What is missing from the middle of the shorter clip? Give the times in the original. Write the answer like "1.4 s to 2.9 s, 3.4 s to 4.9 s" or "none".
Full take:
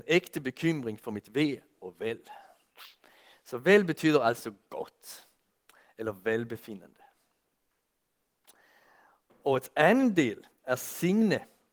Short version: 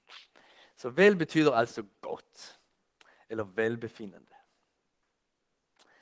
none